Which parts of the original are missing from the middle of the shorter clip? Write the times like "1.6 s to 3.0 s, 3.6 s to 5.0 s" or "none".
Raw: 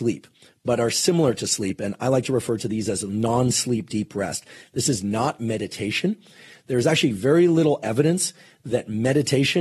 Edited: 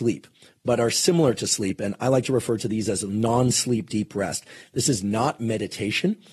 none